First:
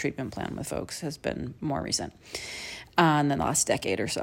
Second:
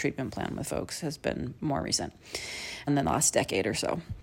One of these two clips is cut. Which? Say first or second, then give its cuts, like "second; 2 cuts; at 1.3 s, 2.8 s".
second; 1 cut; at 2.9 s